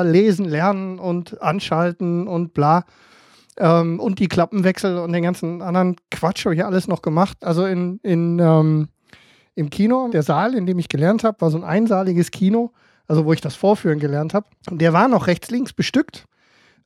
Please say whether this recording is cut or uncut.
cut